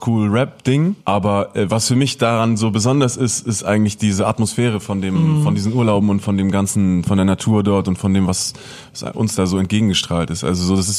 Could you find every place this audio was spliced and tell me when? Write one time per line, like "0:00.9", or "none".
0:01.0